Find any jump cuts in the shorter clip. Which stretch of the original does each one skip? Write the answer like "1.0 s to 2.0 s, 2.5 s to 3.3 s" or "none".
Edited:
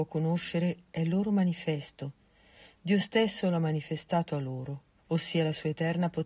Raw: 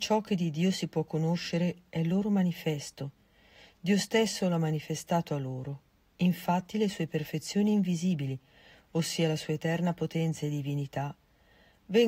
6.0 s to 8.8 s